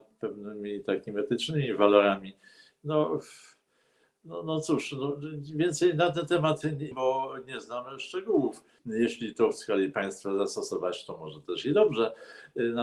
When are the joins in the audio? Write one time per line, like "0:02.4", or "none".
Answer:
0:06.9
0:08.8

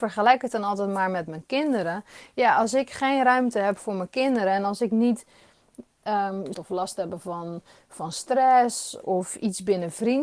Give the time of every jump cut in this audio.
0:06.5
0:09.0

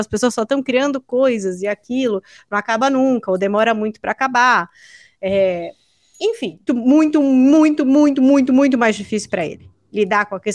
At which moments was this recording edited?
0:06.7

